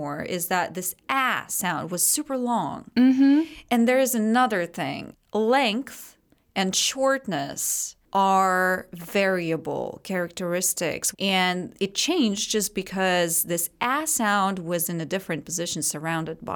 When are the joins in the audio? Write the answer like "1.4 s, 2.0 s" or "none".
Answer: 11.1 s